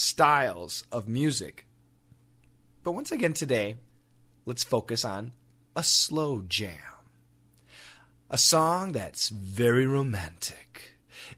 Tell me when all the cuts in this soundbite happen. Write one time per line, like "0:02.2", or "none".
none